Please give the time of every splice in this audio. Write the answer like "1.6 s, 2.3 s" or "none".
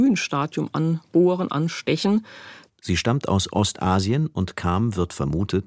2.7 s